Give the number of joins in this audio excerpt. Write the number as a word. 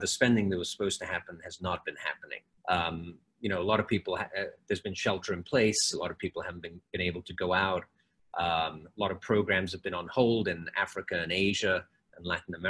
one